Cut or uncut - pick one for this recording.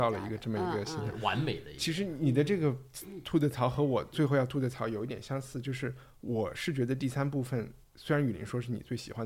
uncut